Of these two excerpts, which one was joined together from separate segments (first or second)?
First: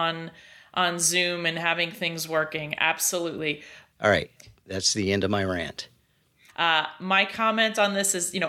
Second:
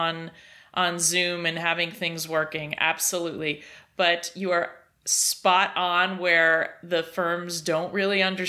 first